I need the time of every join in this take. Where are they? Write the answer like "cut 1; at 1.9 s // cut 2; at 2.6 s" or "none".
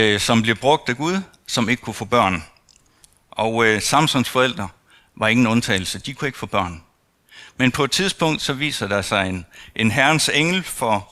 none